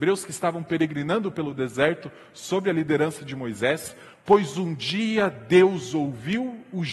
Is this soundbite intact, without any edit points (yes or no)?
yes